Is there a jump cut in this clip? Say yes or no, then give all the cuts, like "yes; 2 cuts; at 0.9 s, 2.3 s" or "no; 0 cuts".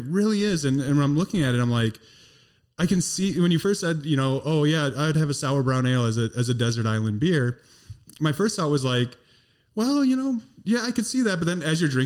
no; 0 cuts